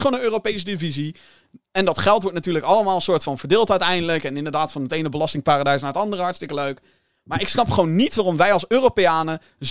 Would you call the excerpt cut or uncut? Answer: uncut